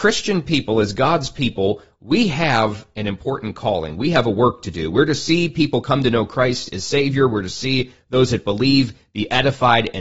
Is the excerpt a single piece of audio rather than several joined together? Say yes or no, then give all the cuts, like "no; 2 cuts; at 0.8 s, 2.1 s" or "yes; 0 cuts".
yes; 0 cuts